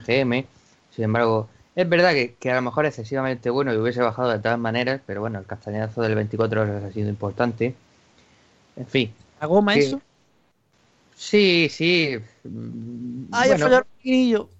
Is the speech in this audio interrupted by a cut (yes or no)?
no